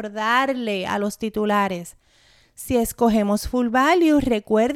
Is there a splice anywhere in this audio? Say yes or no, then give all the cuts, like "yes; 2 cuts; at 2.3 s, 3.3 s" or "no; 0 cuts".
no; 0 cuts